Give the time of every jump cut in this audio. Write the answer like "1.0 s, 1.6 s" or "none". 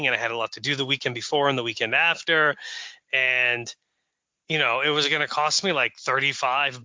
3.0 s

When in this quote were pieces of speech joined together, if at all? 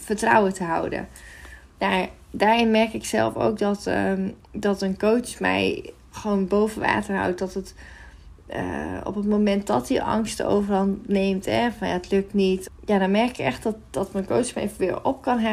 12.6 s

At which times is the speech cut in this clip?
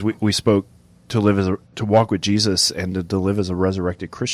1.6 s

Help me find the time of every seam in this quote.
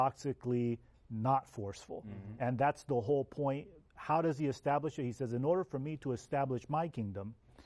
none

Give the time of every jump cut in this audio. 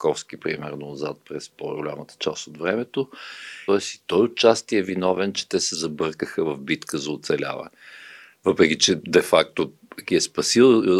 3.7 s

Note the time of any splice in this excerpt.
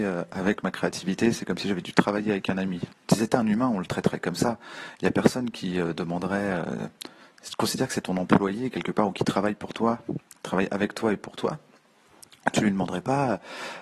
2.9 s

